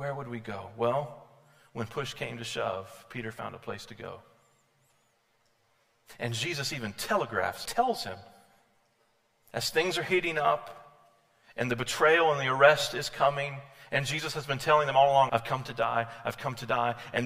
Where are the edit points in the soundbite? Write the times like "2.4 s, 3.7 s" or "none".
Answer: 7.7 s, 15.3 s